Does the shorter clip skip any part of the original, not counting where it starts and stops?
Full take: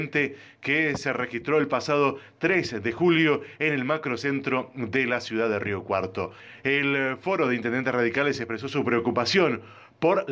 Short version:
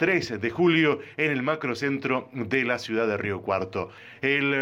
no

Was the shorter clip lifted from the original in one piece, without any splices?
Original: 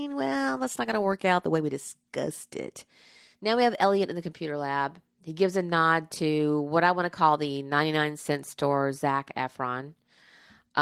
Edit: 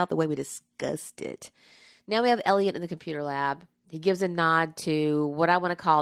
yes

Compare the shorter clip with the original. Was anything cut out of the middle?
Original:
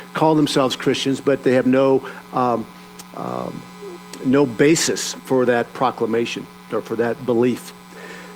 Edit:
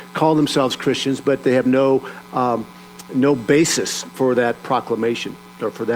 yes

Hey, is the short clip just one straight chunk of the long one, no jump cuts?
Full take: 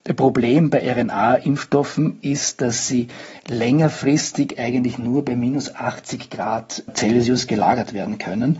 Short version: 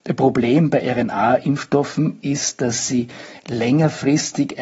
yes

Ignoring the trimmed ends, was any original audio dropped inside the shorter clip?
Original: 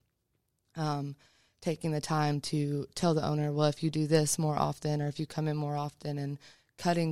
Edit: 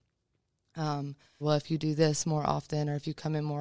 yes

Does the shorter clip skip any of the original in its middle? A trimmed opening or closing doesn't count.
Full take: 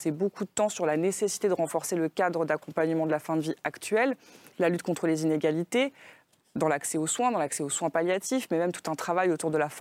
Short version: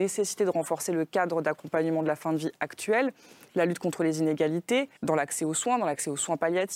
yes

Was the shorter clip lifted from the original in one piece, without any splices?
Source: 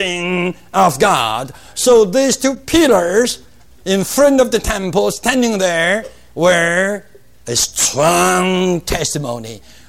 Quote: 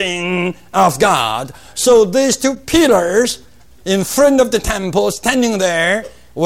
yes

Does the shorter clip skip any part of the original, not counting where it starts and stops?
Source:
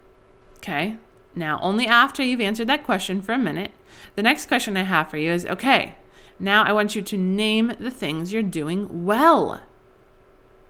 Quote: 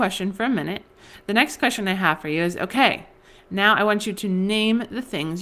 no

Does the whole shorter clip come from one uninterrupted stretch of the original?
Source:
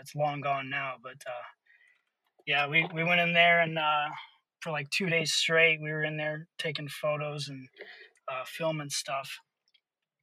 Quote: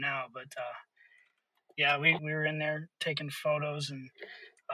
no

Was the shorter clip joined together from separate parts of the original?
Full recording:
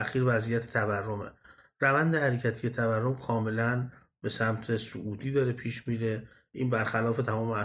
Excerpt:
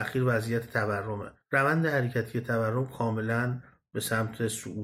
yes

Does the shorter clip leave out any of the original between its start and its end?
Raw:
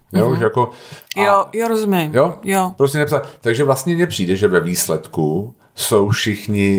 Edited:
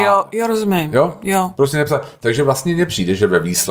no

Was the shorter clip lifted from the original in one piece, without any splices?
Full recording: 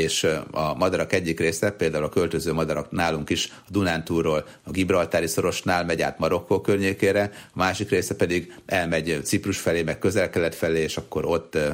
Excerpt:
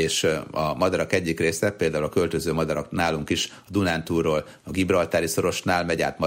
yes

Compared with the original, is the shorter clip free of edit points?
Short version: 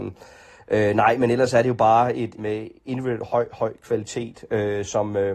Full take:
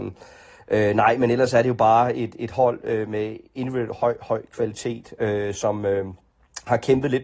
no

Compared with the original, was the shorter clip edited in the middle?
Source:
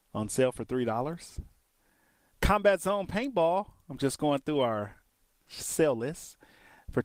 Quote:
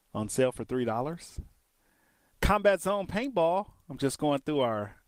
no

